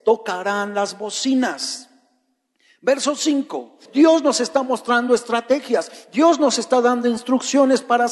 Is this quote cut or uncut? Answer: cut